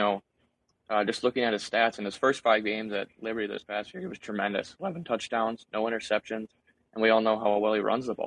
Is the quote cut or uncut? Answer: uncut